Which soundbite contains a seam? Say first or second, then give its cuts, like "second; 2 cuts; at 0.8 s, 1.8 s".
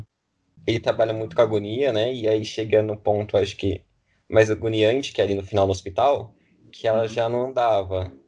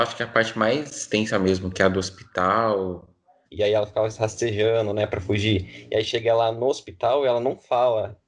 second; 1 cut; at 3.5 s